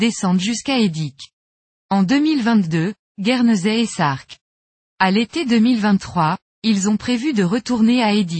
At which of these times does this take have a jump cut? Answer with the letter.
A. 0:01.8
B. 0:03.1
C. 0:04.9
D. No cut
B